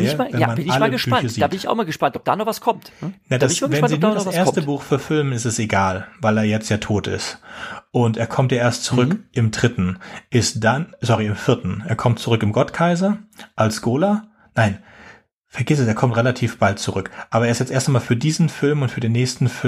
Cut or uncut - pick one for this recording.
uncut